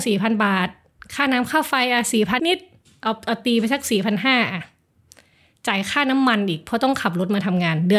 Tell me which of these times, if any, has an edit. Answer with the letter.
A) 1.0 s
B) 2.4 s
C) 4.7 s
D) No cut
B